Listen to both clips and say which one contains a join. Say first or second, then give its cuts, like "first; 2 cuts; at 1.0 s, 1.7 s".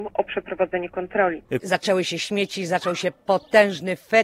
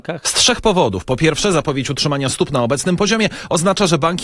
first; 1 cut; at 1.6 s